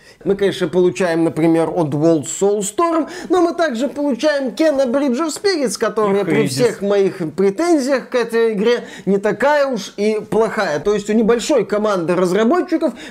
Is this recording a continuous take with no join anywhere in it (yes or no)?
yes